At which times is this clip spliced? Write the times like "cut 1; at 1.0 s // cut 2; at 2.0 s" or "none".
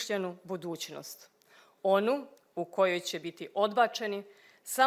none